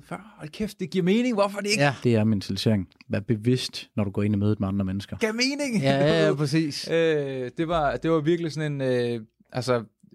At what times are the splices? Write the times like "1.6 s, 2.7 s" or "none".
2.0 s, 5.2 s